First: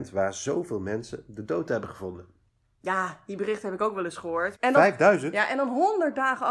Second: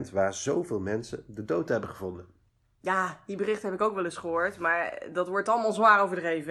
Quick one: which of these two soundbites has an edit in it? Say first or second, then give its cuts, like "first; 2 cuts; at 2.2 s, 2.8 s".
first; 1 cut; at 4.5 s